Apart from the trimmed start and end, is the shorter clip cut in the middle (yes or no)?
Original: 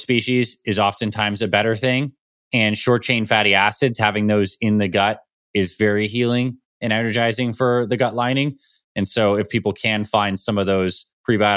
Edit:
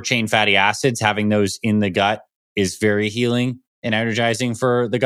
no